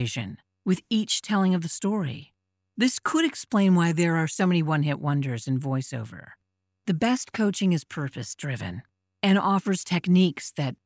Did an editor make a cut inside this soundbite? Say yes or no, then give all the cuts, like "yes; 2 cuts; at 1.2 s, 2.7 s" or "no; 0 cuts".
no; 0 cuts